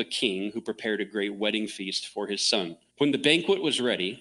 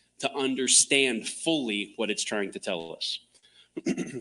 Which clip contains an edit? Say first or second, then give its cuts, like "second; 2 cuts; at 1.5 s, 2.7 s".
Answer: first; 1 cut; at 2.9 s